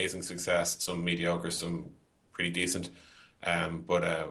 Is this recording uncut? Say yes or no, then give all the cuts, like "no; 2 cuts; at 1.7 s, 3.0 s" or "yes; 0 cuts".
yes; 0 cuts